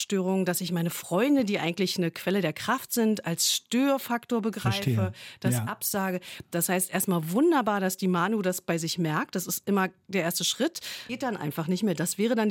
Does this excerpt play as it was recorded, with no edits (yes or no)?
no